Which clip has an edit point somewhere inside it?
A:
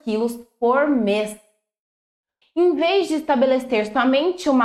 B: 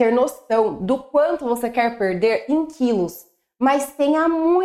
A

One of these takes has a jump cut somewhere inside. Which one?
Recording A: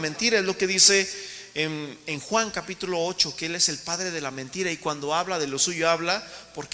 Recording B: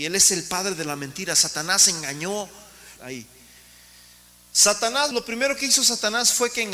B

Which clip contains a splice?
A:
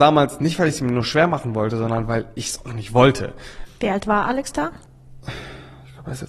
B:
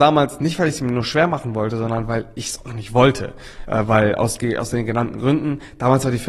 A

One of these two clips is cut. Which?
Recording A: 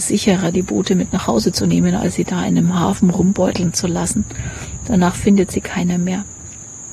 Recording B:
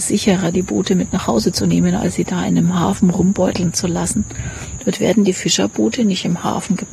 B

